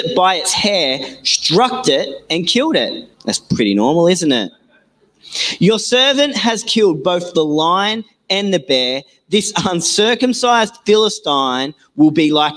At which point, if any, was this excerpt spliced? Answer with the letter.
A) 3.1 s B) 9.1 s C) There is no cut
A